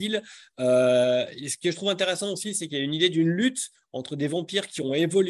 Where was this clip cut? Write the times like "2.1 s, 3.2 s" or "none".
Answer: none